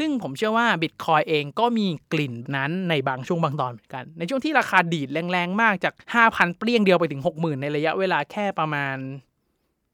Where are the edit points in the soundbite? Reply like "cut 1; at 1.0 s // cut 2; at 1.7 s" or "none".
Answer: cut 1; at 2.4 s // cut 2; at 6.0 s